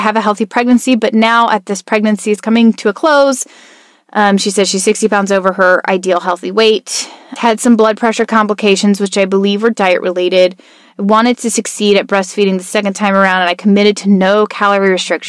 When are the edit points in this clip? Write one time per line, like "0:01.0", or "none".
0:07.4